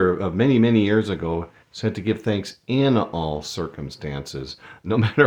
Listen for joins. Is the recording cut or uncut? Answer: uncut